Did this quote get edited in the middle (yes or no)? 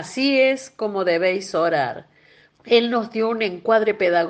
yes